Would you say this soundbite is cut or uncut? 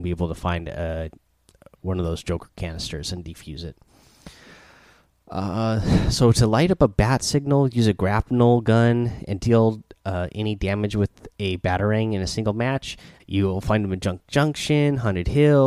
cut